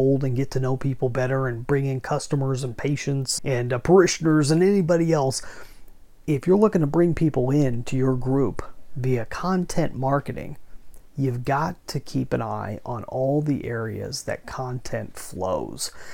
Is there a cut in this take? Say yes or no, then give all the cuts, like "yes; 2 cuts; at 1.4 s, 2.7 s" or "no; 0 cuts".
yes; 1 cut; at 3.4 s